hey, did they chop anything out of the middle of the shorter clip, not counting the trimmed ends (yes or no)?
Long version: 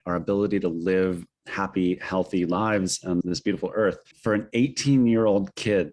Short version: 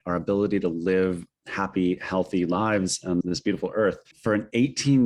no